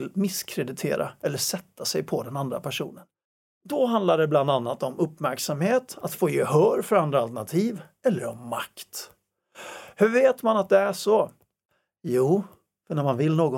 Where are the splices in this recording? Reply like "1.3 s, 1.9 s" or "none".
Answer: none